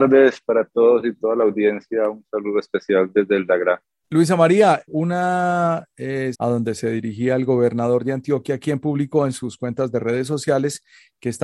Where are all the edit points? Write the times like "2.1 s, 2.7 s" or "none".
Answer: 4.9 s, 6.3 s